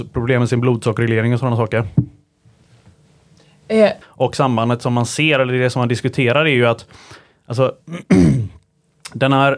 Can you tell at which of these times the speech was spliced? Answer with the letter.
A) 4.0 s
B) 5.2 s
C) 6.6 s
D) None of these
A